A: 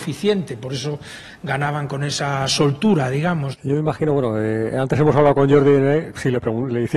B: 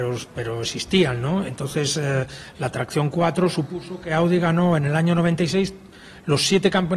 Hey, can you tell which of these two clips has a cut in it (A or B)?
A